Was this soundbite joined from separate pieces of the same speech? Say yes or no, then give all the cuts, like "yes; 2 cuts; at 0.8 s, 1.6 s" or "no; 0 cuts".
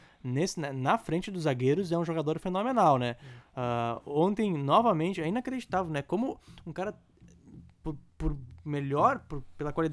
no; 0 cuts